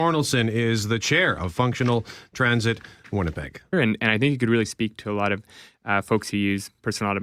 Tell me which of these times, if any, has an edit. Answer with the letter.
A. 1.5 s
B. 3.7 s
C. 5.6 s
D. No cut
B